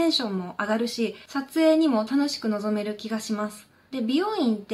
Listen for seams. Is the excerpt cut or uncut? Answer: uncut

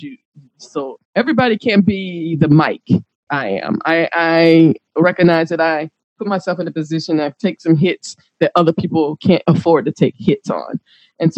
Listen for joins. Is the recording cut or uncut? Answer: cut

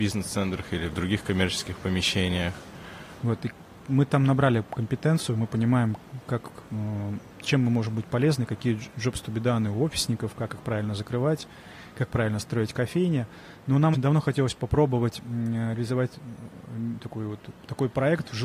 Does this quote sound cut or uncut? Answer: cut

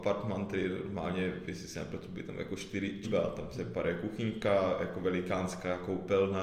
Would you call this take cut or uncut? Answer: cut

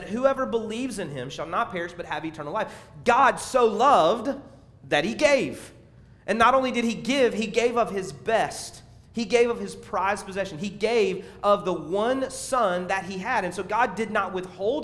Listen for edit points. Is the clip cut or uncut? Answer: uncut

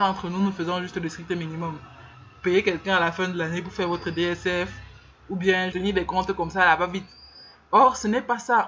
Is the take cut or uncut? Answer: cut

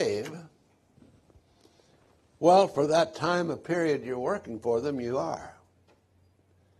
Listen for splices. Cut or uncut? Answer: uncut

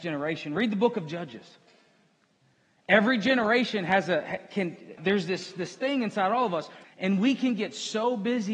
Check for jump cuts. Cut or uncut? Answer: cut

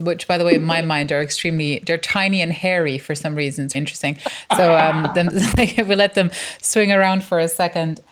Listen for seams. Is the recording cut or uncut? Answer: cut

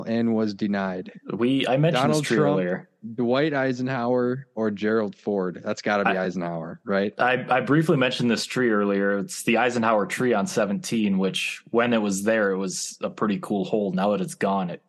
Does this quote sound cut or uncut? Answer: uncut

